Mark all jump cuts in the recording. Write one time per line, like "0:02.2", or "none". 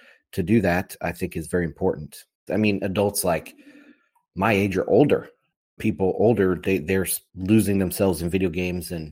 0:02.5
0:05.8
0:07.3